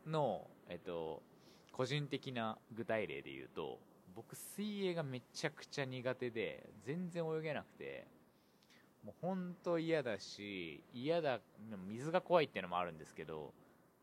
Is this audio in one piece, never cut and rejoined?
no; 1 cut; at 2.7 s

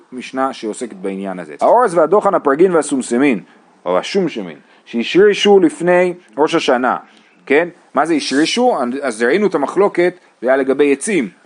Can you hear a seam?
yes; 1 cut; at 1.6 s

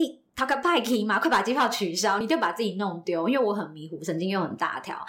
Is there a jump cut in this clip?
no; 0 cuts

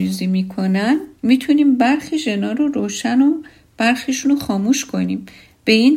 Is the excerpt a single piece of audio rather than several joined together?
no; 1 cut; at 1.2 s

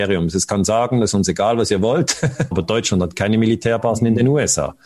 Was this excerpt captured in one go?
no; 1 cut; at 2.5 s

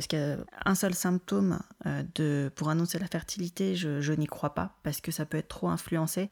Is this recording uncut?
yes; 0 cuts

